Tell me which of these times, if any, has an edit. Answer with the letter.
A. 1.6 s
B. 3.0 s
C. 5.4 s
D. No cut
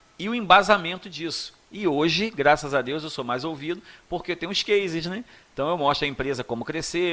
D